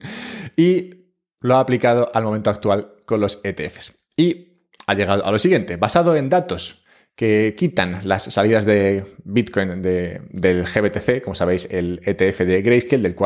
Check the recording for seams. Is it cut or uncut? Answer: uncut